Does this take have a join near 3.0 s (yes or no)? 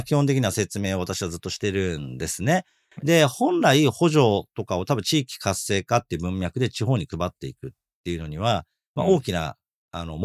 yes